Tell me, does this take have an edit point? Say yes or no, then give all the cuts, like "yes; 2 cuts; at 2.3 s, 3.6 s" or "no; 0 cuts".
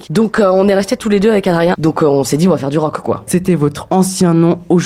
yes; 2 cuts; at 1.7 s, 3.3 s